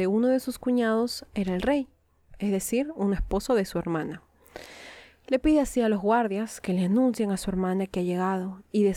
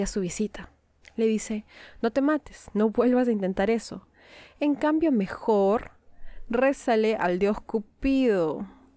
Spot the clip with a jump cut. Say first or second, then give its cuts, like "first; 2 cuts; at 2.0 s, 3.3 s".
second; 1 cut; at 1.0 s